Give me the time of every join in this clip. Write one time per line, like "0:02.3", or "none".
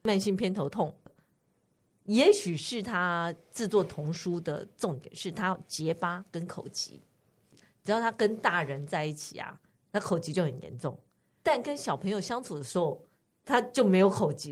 none